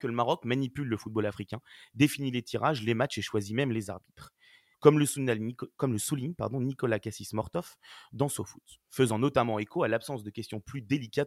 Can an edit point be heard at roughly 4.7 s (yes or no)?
yes